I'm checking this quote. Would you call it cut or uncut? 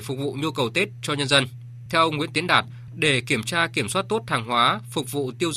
cut